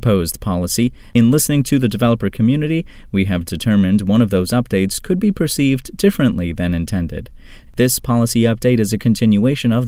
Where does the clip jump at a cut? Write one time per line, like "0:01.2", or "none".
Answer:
0:01.1
0:07.7